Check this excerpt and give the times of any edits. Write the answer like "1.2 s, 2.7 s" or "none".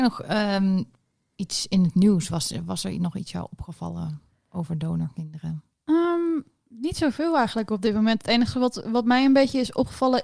none

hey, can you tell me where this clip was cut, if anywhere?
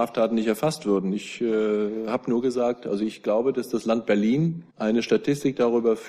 4.7 s

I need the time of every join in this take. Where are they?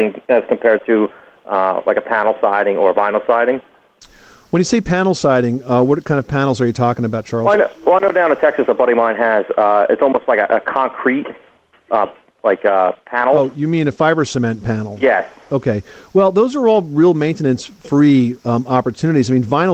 none

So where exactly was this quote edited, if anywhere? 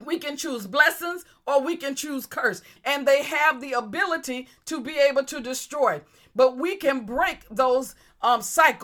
2.8 s

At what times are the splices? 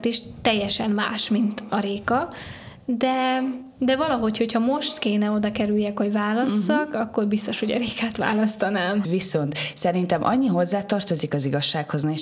9.0 s

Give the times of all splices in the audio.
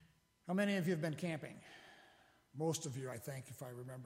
none

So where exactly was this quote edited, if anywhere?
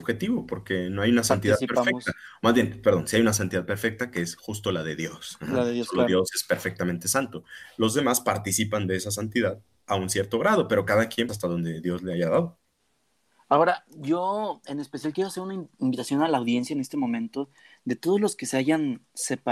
11.3 s

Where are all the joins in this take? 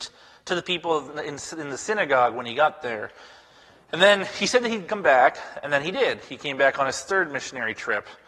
none

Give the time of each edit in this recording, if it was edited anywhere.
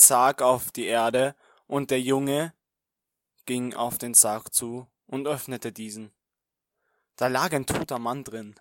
none

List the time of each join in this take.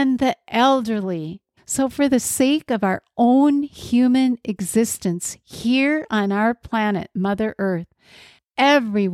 1.6 s

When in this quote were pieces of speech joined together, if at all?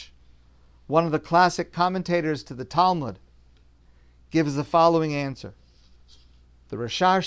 none

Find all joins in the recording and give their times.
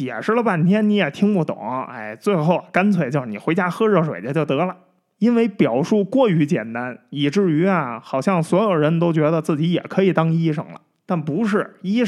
none

